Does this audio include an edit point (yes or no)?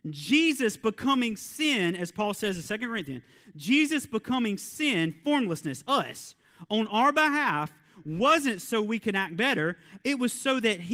no